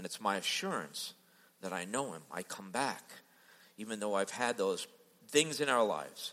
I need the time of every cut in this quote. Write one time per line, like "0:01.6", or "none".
none